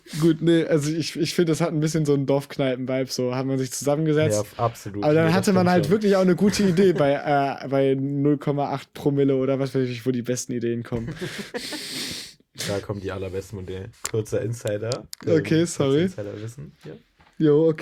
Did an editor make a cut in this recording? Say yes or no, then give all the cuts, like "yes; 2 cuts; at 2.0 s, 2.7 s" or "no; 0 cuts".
yes; 1 cut; at 13.9 s